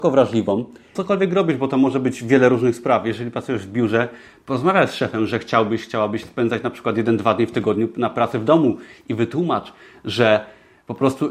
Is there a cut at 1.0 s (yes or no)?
yes